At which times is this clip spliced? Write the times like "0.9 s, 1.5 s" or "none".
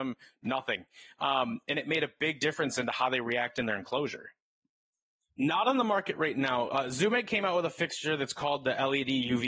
5.3 s